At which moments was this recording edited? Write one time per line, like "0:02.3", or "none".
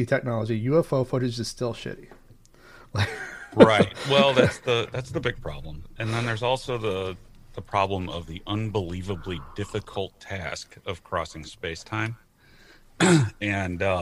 none

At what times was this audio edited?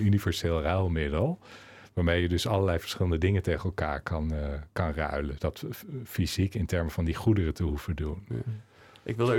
0:05.4

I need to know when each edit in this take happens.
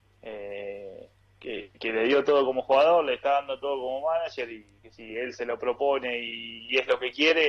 0:01.8

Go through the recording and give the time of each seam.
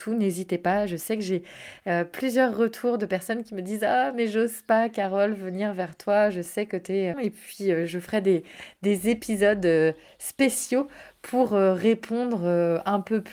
0:07.1

